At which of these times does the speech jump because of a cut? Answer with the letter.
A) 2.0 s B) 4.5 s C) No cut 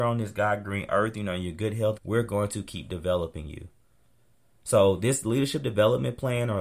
A